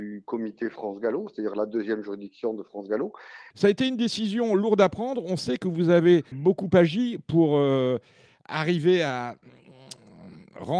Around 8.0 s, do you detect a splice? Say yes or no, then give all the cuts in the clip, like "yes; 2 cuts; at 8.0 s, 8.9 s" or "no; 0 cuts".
no; 2 cuts; at 3.5 s, 6.3 s